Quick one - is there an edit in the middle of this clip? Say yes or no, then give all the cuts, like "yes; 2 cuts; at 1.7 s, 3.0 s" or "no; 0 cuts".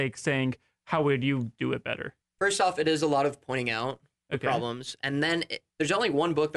no; 0 cuts